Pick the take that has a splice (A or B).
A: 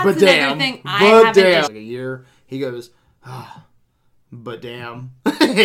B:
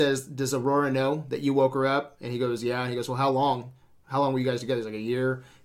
A